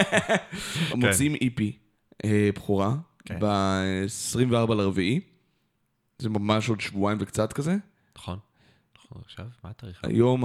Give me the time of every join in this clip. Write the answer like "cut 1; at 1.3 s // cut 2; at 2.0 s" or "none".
cut 1; at 0.9 s